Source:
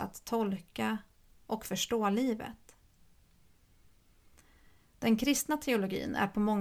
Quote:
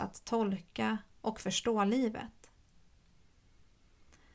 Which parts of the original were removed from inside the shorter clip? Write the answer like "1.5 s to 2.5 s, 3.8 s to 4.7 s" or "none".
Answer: 1.1 s to 1.4 s